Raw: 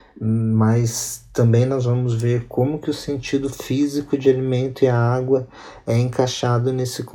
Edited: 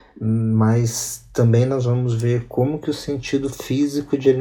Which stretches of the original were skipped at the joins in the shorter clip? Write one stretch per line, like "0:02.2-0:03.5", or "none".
none

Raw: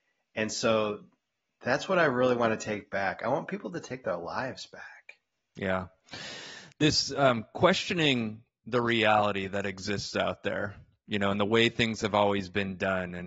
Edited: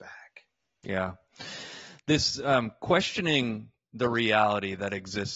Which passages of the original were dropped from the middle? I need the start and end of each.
none

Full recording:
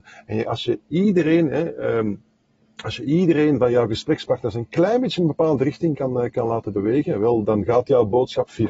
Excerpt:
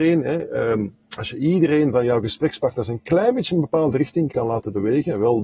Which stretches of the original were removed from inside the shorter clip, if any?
0:02.3-0:02.7
0:06.0-0:06.3

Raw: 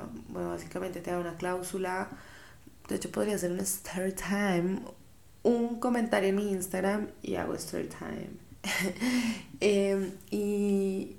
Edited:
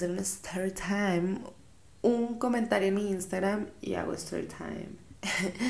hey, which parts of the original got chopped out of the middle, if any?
none

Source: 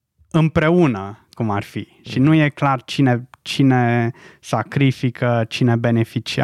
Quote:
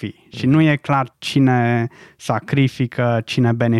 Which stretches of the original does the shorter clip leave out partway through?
0:02.9-0:03.4

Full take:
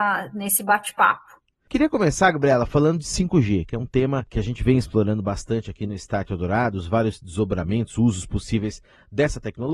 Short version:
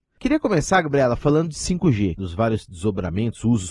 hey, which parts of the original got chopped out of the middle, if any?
0:03.7-0:06.7

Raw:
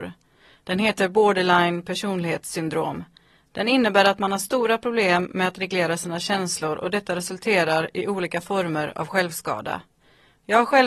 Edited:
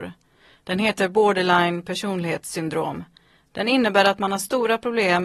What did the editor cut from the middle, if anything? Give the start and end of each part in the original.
none

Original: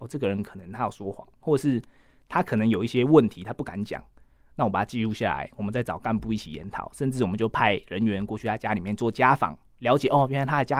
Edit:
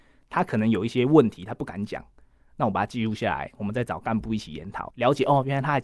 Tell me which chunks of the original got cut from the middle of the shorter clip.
0:06.9-0:09.7

